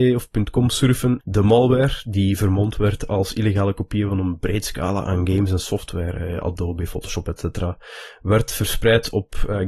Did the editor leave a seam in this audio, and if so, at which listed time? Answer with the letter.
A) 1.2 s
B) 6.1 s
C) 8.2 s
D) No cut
A